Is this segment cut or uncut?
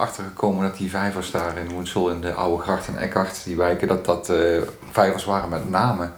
uncut